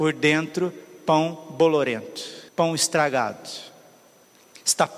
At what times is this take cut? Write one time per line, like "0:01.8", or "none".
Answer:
0:02.5